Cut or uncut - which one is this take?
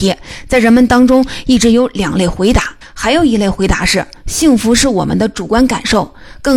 cut